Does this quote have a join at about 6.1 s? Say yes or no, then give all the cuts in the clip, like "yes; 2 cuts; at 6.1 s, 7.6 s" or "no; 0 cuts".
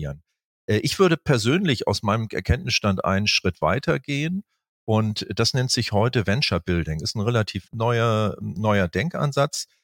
no; 1 cut; at 7.7 s